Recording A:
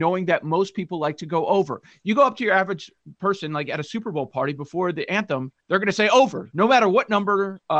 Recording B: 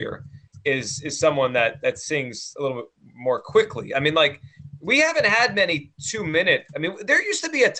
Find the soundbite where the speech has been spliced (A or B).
A